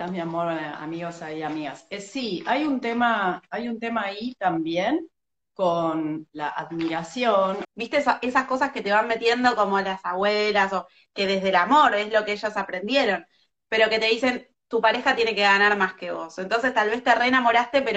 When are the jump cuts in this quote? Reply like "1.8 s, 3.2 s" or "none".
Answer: 6.3 s, 7.6 s